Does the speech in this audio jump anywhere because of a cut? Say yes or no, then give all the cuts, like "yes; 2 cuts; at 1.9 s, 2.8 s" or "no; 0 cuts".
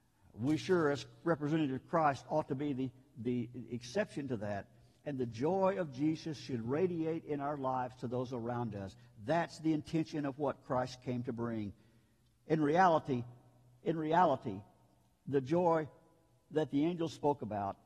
no; 0 cuts